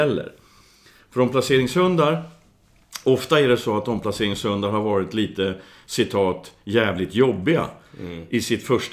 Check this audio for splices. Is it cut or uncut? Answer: uncut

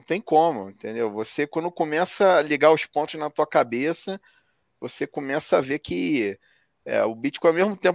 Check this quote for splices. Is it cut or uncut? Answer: uncut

